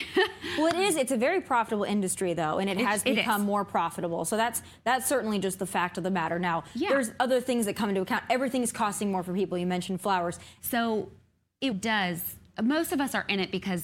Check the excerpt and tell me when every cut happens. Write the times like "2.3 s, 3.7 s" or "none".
10.6 s, 11.7 s